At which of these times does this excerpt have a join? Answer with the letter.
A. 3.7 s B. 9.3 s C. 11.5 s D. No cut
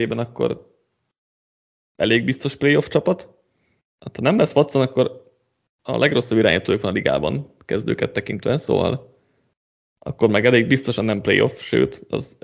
D